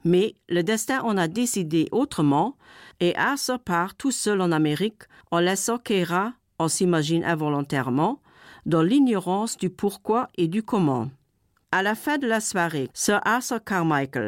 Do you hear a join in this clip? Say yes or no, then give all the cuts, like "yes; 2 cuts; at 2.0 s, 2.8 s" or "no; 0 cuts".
yes; 2 cuts; at 11.6 s, 12.9 s